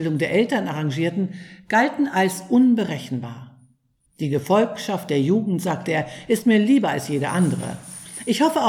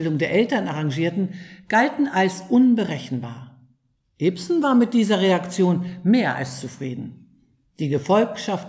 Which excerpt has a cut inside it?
first; 1 cut; at 4.1 s

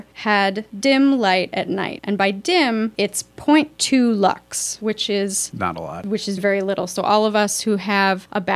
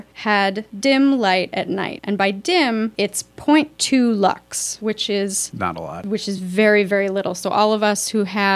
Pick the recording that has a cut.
first; 1 cut; at 6.4 s

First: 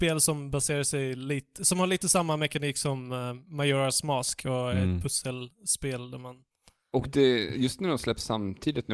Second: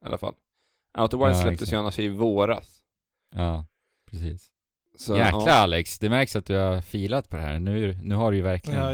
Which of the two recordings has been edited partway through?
first; 1 cut; at 6.9 s

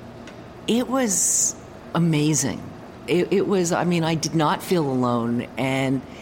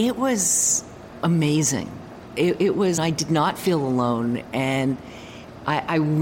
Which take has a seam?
second; 1 cut; at 3.0 s

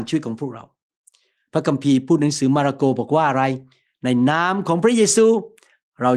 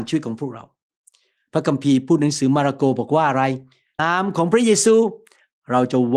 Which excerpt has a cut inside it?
second; 1 cut; at 4.0 s

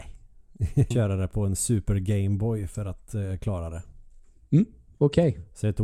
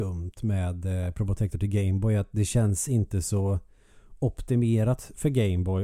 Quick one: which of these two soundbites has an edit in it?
first; 1 cut; at 0.9 s

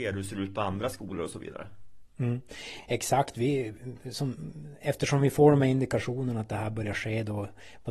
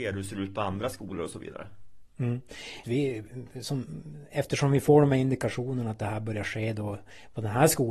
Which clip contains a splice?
second; 1 cut; at 2.8 s

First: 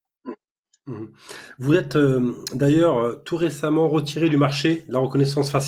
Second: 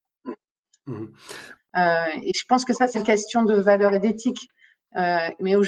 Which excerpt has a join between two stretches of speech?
second; 2 cuts; at 1.6 s, 2.9 s

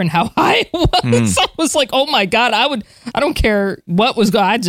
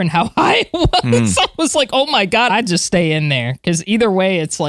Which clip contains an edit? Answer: second; 1 cut; at 2.5 s

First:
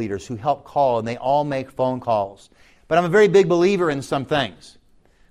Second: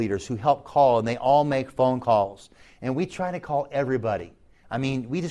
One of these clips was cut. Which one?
first; 1 cut; at 2.7 s

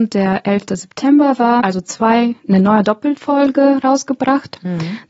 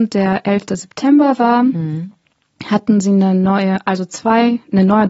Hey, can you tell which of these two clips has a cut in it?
first; 1 cut; at 1.6 s

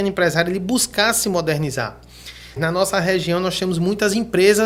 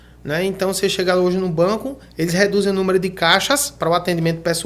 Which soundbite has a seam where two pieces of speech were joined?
first; 1 cut; at 2.6 s

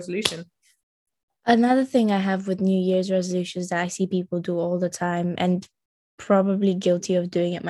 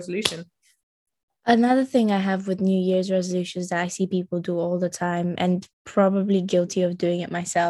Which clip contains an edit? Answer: second; 1 cut; at 5.7 s

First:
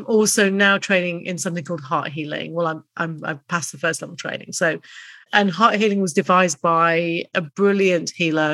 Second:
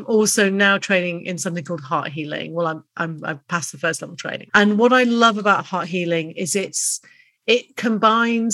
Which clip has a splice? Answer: second; 1 cut; at 4.5 s

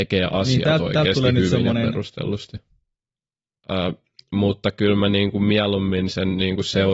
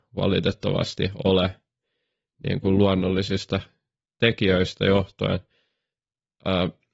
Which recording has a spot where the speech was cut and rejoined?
first; 1 cut; at 3.6 s

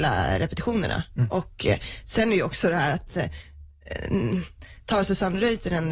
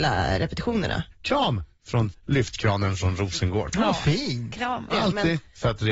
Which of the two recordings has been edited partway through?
second; 2 cuts; at 1.1 s, 4.9 s

